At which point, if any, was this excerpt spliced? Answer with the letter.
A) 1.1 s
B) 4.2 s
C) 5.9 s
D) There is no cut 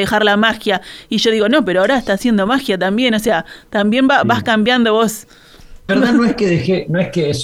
C